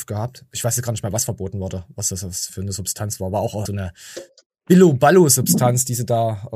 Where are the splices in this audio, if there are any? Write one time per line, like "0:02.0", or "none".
0:02.5
0:03.7